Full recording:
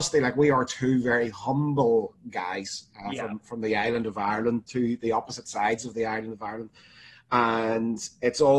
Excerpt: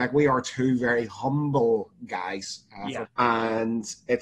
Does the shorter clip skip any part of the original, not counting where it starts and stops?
yes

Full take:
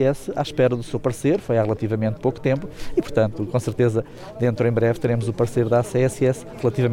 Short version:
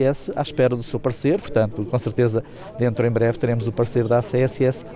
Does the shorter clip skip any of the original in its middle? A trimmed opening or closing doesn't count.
yes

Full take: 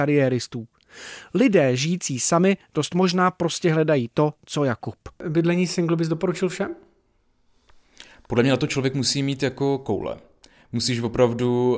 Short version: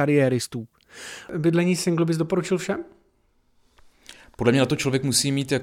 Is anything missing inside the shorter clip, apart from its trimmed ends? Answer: yes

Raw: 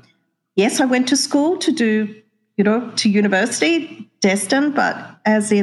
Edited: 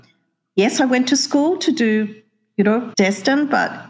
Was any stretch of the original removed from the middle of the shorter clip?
yes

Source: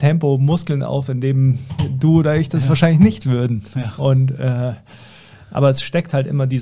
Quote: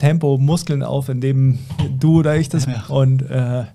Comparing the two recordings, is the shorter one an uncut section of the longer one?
no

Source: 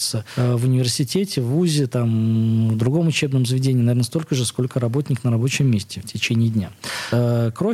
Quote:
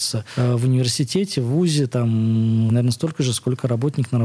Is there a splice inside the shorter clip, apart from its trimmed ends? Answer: yes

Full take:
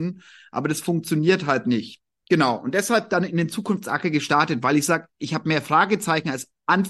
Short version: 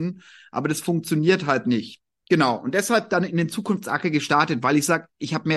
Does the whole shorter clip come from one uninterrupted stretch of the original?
yes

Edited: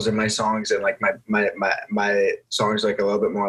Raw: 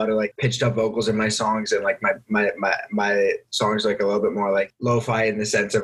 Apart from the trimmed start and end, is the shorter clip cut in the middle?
no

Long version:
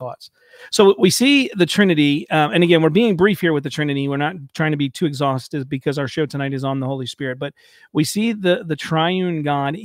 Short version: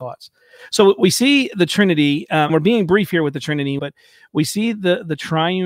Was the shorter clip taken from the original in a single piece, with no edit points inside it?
no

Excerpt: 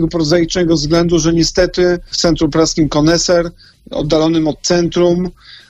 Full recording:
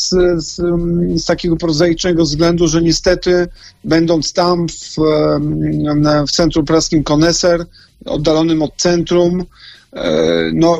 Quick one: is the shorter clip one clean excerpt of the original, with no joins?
no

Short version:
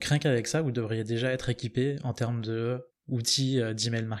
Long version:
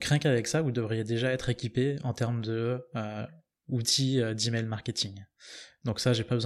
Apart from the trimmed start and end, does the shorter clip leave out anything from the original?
yes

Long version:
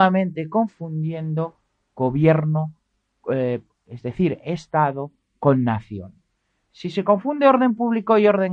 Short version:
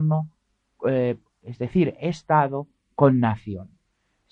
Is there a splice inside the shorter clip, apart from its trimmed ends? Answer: no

